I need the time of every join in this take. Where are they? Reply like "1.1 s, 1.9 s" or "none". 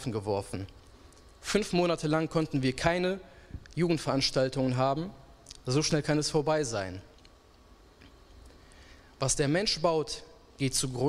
none